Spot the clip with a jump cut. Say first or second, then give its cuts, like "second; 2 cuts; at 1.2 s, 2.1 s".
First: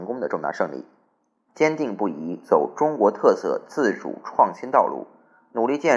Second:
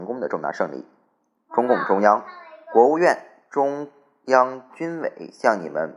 first; 1 cut; at 1.5 s